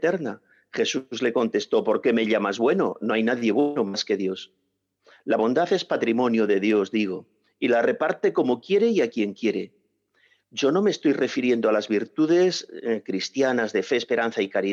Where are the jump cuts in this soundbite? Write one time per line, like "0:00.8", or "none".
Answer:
none

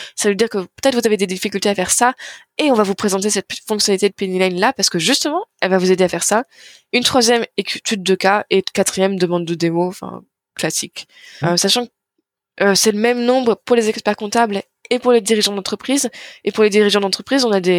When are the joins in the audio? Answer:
0:11.4

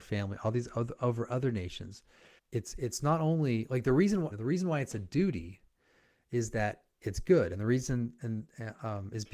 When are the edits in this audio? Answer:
0:02.4
0:04.3

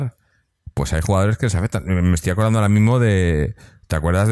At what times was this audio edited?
none

